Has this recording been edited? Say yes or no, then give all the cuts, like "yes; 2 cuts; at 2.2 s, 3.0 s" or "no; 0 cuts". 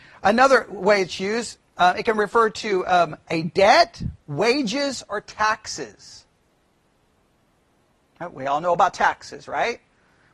no; 0 cuts